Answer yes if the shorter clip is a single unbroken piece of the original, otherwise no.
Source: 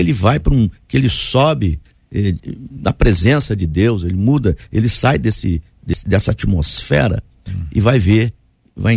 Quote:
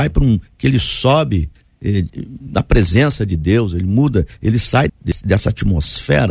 no